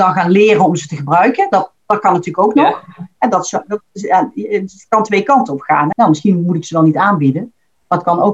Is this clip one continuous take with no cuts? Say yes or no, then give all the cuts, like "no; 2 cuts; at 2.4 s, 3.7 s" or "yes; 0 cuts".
no; 1 cut; at 5.9 s